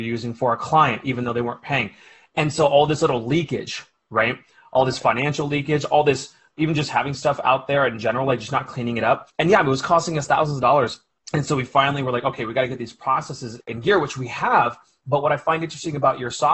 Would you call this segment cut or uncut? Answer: uncut